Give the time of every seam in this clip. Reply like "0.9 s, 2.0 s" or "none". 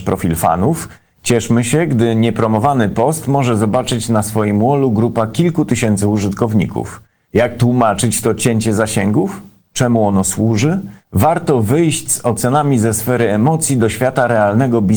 7.3 s, 11.0 s